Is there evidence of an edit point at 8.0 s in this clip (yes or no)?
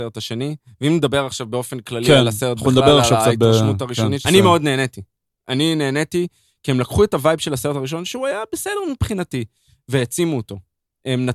no